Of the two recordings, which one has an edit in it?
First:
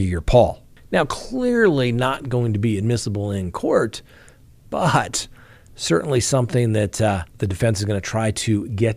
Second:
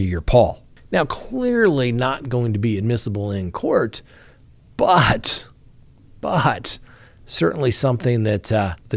first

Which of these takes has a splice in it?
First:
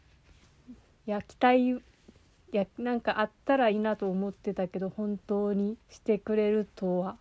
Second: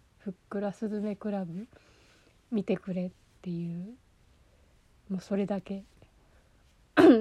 first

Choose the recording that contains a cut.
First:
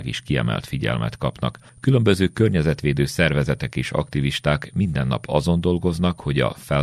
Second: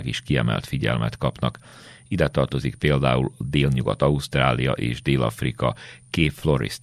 first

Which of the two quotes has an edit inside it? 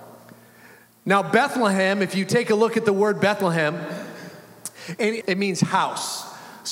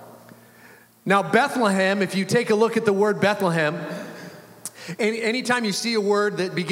first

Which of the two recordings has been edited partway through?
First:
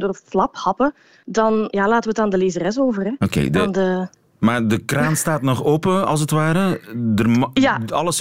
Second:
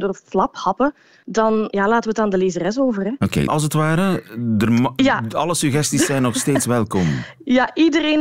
second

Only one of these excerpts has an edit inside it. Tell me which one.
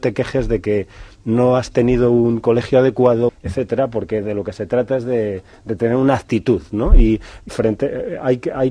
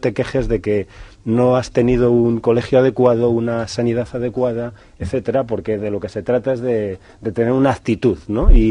first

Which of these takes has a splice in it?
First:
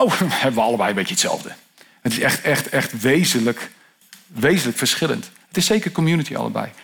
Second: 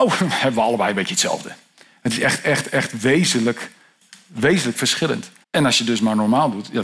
second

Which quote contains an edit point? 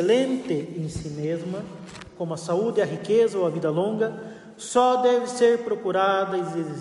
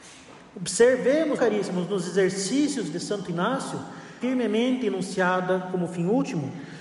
second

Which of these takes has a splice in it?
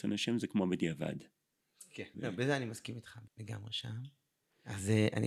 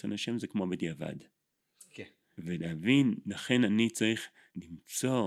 first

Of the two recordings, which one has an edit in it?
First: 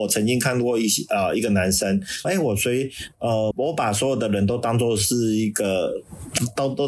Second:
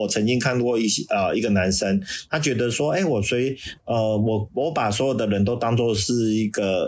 first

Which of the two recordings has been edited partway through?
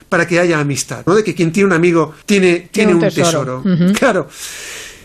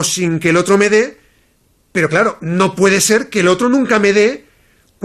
first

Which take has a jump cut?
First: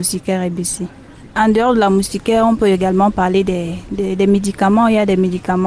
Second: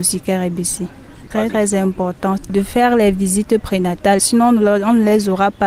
second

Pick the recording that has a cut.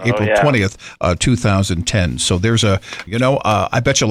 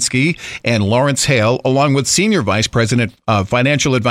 first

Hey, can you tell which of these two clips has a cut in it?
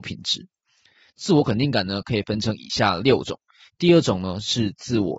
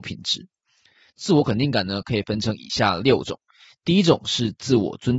first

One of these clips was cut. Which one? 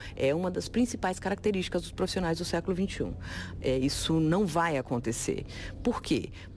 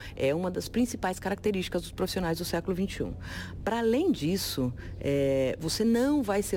first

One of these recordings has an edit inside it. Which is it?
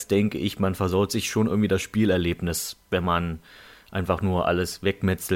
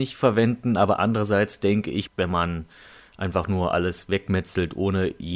second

